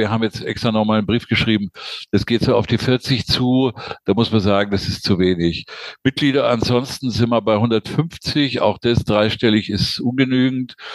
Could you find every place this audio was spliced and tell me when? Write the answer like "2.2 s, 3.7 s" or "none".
none